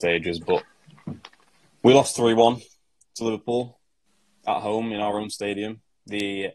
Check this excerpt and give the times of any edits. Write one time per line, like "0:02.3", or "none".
none